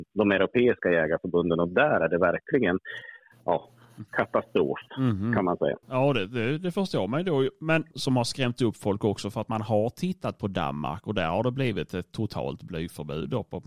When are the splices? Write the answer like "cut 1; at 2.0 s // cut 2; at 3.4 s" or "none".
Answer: cut 1; at 5.8 s // cut 2; at 7.9 s